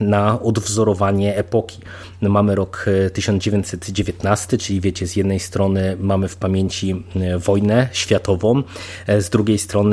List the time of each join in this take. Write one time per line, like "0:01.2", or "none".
none